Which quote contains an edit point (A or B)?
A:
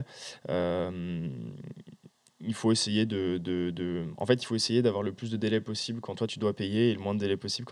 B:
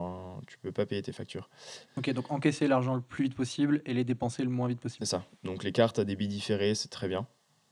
B